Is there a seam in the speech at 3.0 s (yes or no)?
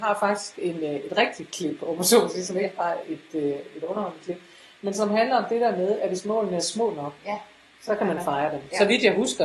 yes